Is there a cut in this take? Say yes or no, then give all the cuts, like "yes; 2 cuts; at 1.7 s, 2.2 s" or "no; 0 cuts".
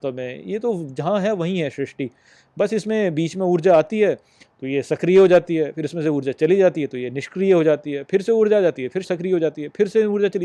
yes; 1 cut; at 9.0 s